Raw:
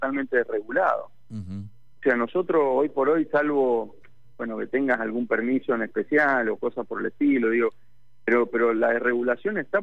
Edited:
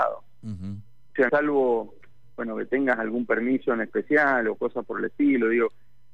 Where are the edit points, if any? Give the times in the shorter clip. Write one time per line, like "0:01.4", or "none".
0:01.3